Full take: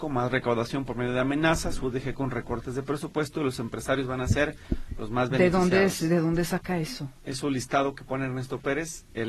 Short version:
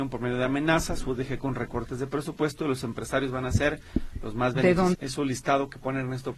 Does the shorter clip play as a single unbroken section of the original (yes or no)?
no